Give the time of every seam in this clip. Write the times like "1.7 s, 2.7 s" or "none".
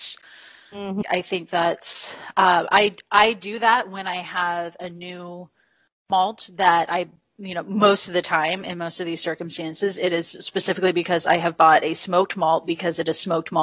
1.0 s

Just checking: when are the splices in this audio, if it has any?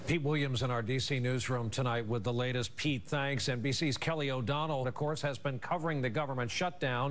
4.8 s

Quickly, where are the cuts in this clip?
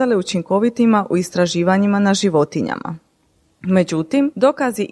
none

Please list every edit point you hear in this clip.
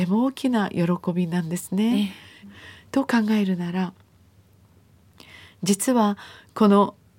2.4 s

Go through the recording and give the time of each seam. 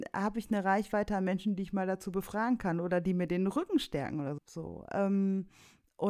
4.4 s

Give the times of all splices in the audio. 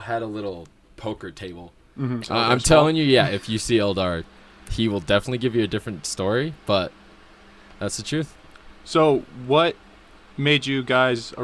2.2 s

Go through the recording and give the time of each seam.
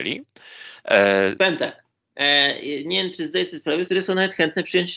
1.4 s, 3.9 s

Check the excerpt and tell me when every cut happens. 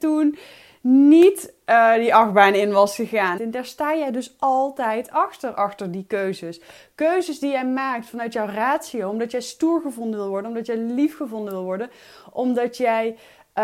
3.4 s

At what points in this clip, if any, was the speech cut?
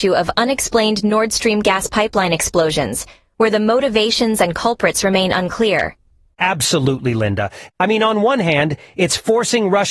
6.3 s, 7.7 s

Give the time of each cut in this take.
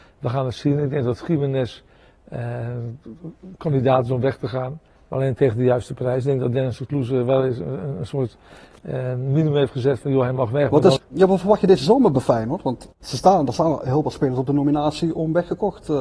11.0 s, 12.9 s

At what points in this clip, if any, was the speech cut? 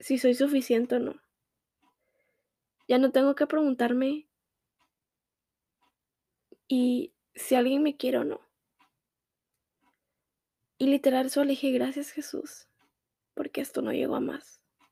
none

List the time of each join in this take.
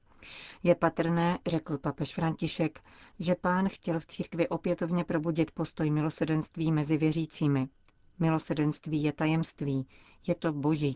none

